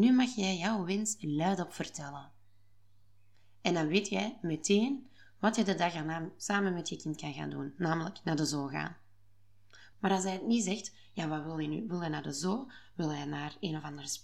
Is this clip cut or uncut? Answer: cut